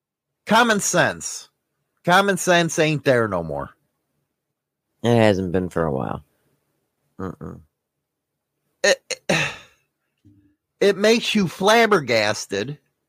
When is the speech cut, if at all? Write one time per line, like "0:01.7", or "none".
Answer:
none